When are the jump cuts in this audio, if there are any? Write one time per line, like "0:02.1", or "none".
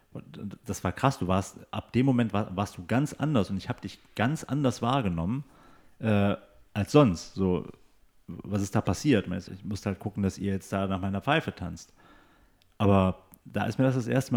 0:09.5